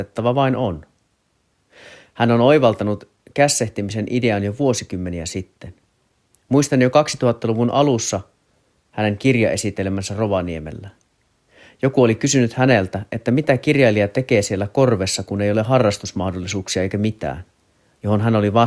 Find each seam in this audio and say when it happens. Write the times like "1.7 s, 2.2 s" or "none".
none